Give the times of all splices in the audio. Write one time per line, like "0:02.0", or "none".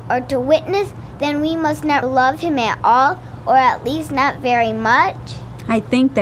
0:02.0

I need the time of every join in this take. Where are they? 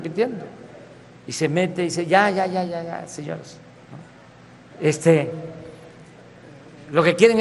0:02.7
0:04.7

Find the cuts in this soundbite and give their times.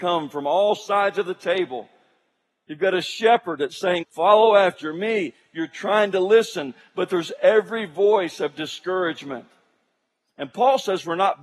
0:04.0

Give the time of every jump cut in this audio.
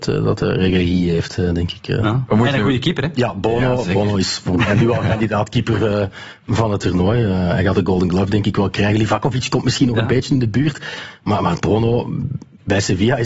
none

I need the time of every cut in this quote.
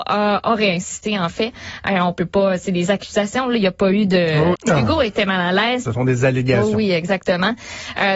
0:04.5
0:05.8

